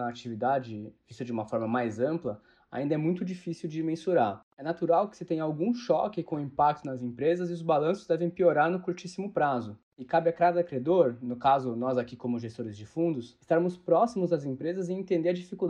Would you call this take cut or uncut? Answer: uncut